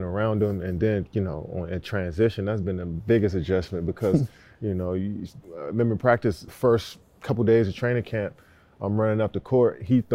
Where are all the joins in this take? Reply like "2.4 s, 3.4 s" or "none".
6.5 s